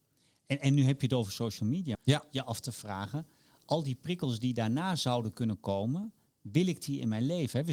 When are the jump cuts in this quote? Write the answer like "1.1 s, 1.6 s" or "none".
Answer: 1.9 s